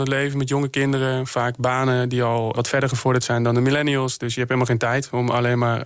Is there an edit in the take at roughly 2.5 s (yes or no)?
yes